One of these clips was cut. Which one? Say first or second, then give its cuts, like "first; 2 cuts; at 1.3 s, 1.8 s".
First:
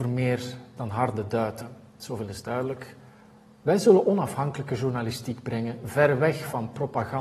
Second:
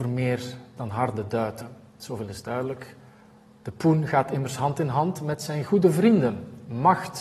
first; 1 cut; at 3.5 s